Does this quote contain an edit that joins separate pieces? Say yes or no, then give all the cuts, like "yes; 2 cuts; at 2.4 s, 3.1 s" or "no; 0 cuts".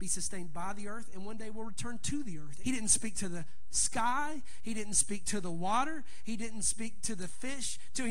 yes; 1 cut; at 2.6 s